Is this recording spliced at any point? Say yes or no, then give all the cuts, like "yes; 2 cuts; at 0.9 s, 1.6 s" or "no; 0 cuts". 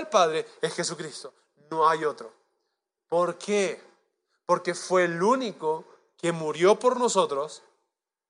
no; 0 cuts